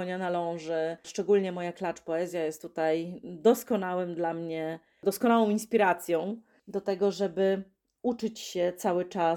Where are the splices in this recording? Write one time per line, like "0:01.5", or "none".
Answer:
none